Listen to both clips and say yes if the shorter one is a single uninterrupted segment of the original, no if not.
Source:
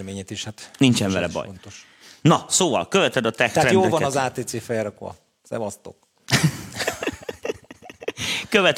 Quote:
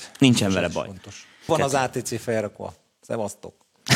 no